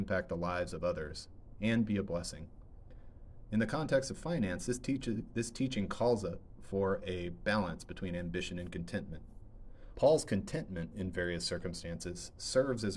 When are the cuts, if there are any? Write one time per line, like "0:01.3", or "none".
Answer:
0:03.5
0:09.9